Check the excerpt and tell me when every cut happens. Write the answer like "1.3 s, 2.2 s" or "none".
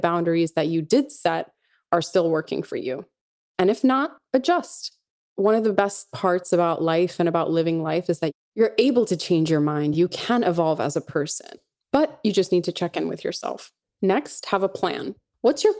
none